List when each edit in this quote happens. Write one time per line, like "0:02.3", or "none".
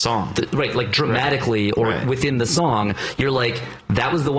none